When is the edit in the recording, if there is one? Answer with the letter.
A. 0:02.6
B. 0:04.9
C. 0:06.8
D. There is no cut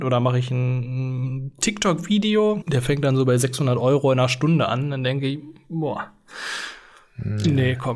A